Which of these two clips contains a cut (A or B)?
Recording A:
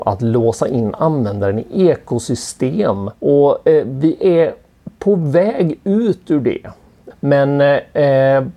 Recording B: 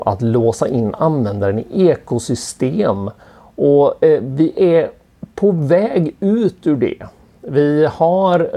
A